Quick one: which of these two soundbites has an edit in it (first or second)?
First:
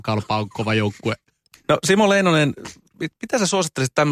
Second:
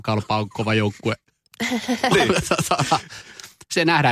first